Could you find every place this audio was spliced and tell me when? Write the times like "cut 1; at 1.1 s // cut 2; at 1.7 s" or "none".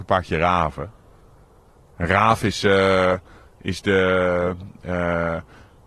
none